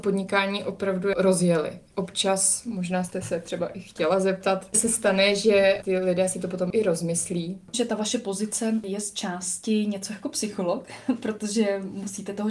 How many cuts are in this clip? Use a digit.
1